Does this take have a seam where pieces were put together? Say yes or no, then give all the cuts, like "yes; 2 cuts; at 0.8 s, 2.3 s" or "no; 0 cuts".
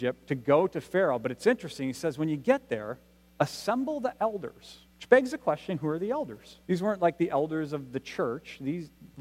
yes; 2 cuts; at 4.9 s, 6.6 s